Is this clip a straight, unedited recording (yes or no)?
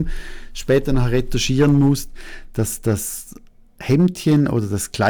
yes